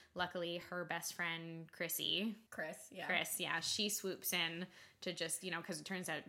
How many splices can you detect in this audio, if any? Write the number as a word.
one